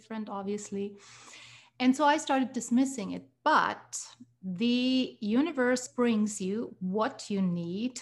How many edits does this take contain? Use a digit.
1